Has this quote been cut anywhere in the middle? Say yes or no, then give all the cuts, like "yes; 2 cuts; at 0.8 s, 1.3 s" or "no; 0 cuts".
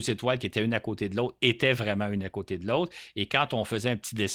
no; 0 cuts